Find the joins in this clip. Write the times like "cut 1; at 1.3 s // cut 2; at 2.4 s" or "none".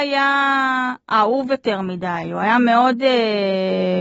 none